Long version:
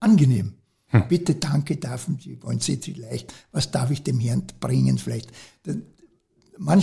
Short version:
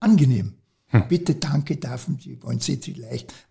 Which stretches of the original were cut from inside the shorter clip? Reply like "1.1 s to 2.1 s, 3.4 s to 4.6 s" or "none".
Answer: none